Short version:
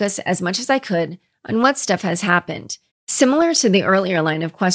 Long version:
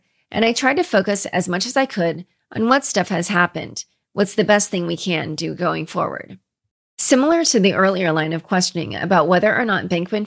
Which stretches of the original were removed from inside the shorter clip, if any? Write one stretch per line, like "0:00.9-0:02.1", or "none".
0:04.0-0:06.8